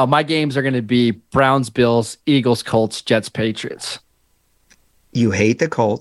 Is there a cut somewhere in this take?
no; 0 cuts

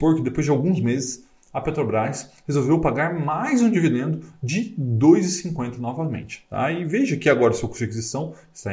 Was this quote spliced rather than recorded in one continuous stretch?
no; 0 cuts

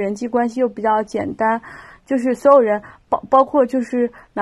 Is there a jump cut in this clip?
no; 0 cuts

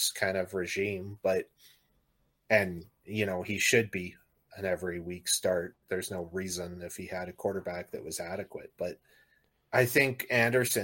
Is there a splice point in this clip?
no; 0 cuts

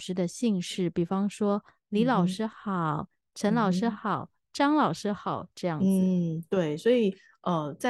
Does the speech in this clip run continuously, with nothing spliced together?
yes; 0 cuts

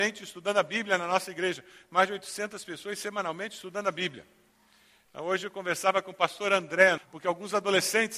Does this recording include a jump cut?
yes; 2 cuts; at 5.1 s, 7.0 s

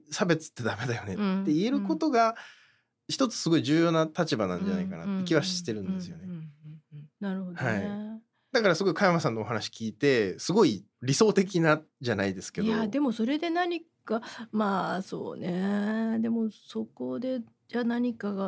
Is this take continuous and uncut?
no; 2 cuts; at 7.2 s, 10.9 s

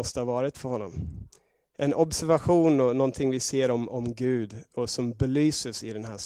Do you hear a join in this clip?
no; 0 cuts

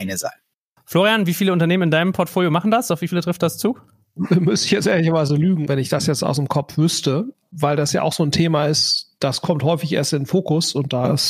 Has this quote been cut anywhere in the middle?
no; 0 cuts

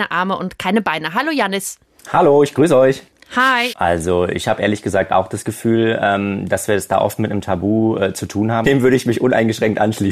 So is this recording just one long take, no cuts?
no; 2 cuts; at 3.7 s, 8.6 s

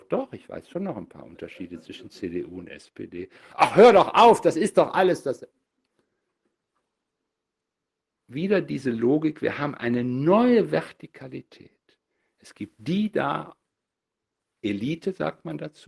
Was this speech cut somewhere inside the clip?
no; 0 cuts

